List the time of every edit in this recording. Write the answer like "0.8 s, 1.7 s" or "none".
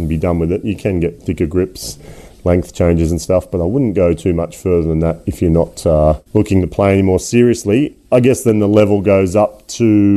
6.3 s